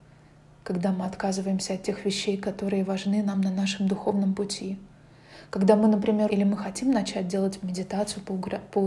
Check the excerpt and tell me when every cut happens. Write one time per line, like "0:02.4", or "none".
0:06.3